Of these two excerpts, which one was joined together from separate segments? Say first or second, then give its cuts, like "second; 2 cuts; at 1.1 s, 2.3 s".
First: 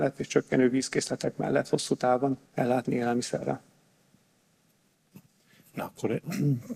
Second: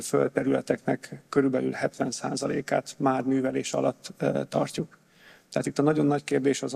first; 1 cut; at 2.5 s